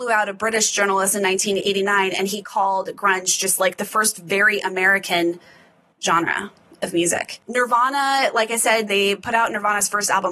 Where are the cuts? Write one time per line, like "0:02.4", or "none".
0:08.9